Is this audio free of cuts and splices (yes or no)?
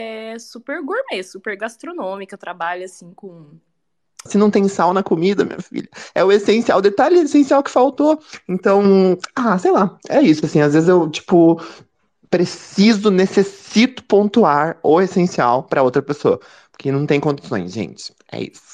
no